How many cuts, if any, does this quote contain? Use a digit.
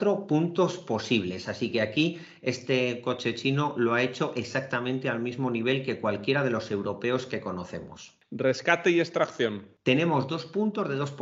0